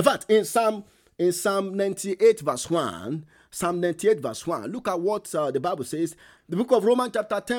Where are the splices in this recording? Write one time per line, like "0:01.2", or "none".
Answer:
0:06.4